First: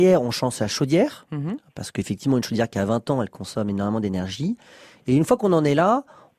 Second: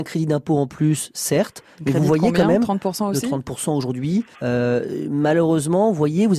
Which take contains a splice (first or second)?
second